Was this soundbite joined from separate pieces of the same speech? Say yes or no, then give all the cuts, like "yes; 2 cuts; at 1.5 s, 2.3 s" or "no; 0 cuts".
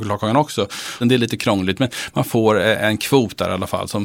yes; 1 cut; at 1.0 s